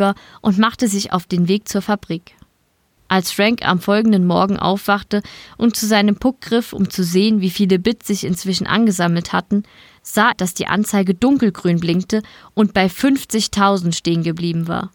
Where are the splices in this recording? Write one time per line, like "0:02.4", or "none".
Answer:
0:03.0
0:10.3